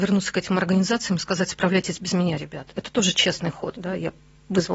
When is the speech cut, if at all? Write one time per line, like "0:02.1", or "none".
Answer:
0:03.7